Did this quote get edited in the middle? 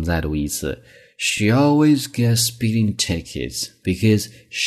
no; 0 cuts

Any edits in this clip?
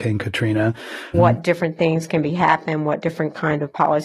yes; 1 cut; at 1.1 s

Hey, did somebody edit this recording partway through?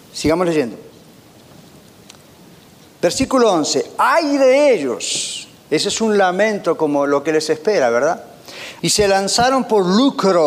yes; 1 cut; at 8.8 s

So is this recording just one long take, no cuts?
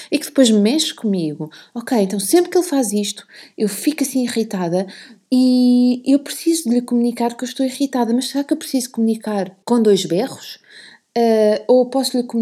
no; 1 cut; at 9.6 s

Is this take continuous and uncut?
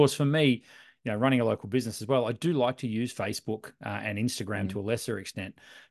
yes; 0 cuts

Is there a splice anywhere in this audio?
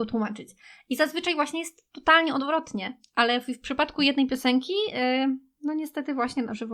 no; 0 cuts

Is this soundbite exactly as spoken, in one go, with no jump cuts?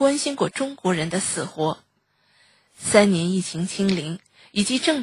yes; 0 cuts

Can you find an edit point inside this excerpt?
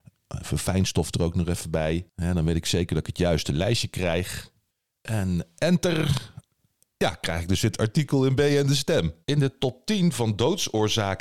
yes; 1 cut; at 9.2 s

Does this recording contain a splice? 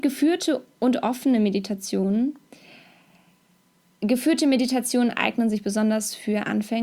no; 0 cuts

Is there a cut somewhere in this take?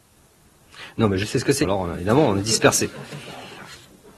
yes; 1 cut; at 1.6 s

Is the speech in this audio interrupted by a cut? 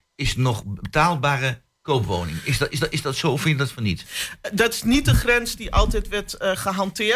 yes; 1 cut; at 2.7 s

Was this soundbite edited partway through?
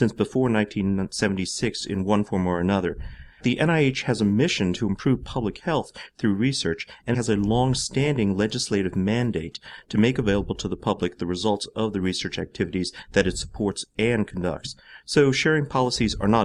yes; 1 cut; at 7.1 s

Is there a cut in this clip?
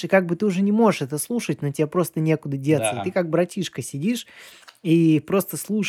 no; 0 cuts

